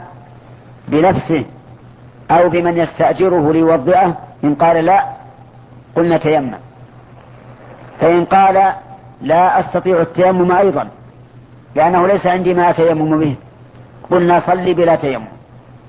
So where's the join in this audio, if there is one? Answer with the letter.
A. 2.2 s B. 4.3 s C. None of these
B